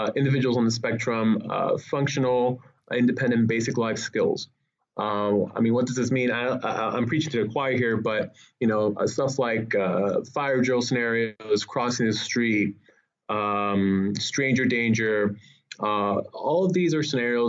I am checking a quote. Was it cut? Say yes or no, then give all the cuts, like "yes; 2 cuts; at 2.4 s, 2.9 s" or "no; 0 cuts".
no; 0 cuts